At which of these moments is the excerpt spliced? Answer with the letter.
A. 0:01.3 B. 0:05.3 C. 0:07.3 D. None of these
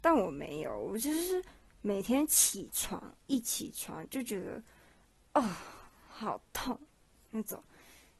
D